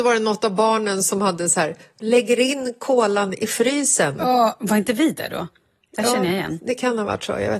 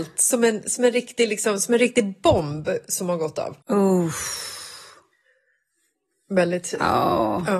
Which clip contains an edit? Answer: second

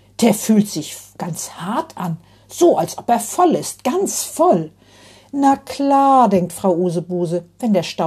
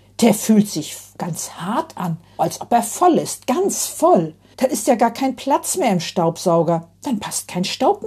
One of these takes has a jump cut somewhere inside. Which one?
second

